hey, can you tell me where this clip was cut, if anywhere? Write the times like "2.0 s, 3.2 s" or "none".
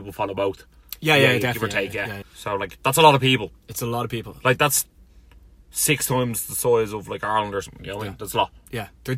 2.2 s

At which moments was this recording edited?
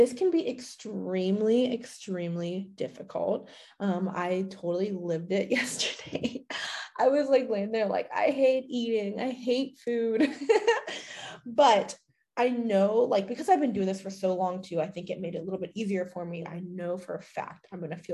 16.4 s

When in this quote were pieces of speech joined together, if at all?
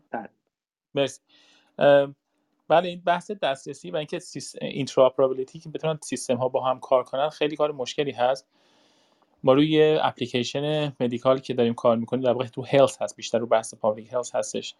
none

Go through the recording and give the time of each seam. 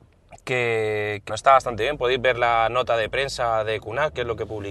1.3 s

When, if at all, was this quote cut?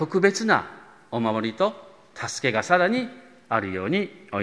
none

